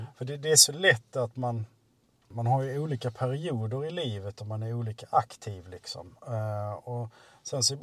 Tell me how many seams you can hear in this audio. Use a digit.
0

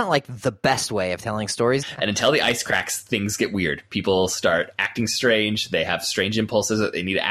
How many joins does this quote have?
1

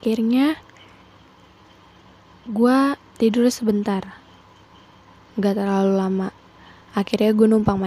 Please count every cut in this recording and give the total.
1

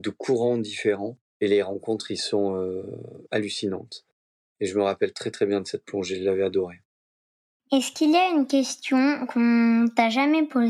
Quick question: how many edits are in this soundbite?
0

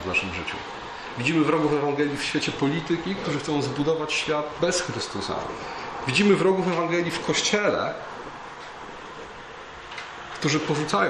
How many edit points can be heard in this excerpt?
0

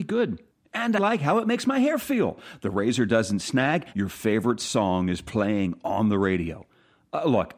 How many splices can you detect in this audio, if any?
2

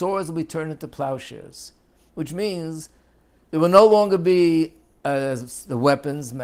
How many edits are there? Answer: 0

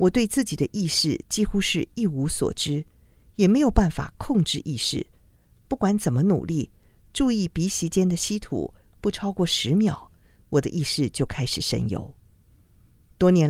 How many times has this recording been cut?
0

